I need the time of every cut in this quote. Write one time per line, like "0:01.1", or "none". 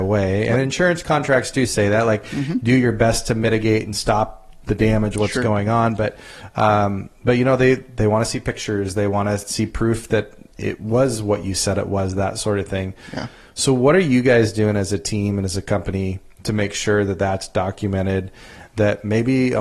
none